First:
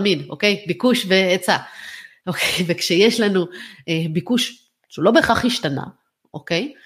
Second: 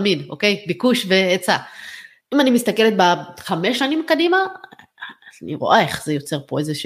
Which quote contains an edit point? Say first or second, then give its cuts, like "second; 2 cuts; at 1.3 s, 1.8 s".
second; 1 cut; at 2.2 s